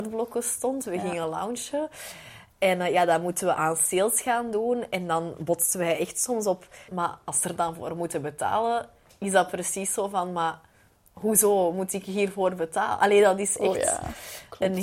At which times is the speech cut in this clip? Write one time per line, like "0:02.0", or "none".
0:06.9